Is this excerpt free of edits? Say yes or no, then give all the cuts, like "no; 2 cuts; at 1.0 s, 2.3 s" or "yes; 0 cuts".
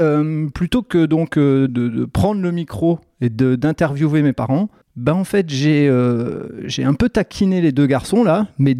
no; 1 cut; at 1.7 s